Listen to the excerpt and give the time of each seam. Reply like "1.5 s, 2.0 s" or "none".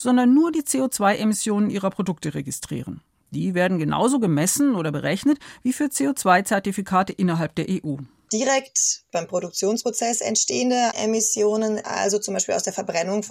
none